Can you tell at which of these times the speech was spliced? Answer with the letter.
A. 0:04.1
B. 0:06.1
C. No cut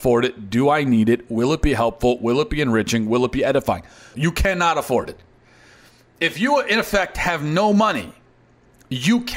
A